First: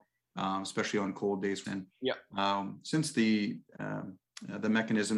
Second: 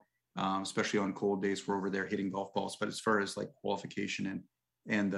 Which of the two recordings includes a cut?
first; 1 cut; at 1.6 s

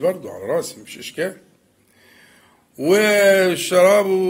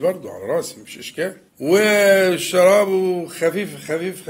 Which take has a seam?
second; 1 cut; at 1.5 s

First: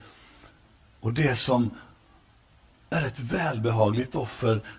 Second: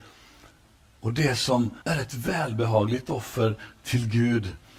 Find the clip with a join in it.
second; 1 cut; at 1.8 s

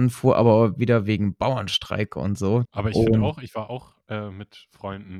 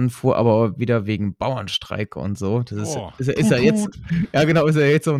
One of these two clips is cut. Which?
first; 1 cut; at 2.6 s

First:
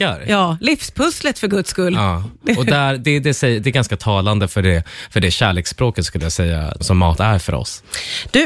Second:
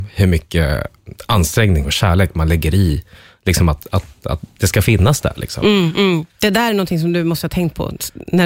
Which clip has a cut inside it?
first; 1 cut; at 6.8 s

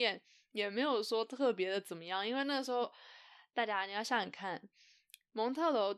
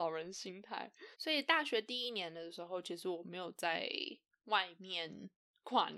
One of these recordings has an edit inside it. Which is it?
second; 1 cut; at 1.1 s

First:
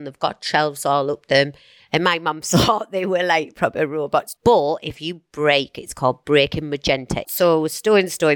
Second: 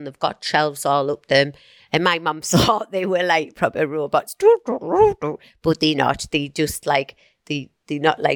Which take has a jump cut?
first; 2 cuts; at 4.4 s, 7.2 s

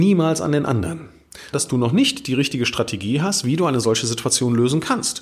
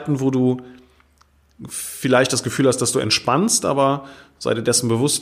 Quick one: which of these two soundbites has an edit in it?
first; 1 cut; at 1.5 s

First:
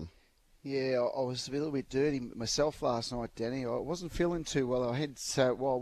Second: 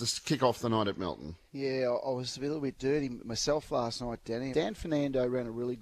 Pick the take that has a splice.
second; 2 cuts; at 1.5 s, 4.5 s

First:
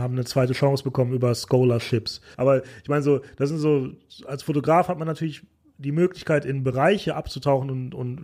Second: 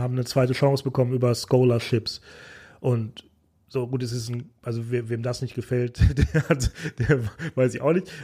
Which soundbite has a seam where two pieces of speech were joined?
first; 1 cut; at 2.3 s

